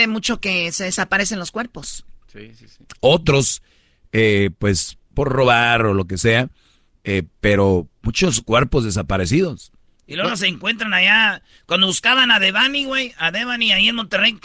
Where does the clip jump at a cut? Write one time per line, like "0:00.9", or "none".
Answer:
0:03.0